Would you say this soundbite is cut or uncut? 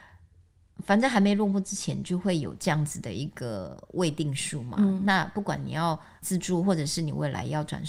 uncut